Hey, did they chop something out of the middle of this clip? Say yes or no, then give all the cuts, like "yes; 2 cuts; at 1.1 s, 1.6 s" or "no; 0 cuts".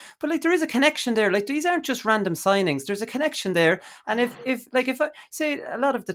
no; 0 cuts